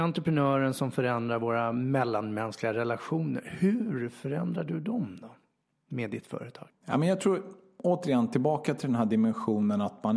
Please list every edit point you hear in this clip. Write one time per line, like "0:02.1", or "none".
none